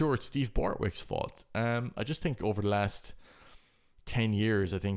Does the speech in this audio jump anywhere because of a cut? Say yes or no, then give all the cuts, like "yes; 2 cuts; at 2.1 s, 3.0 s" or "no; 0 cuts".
no; 0 cuts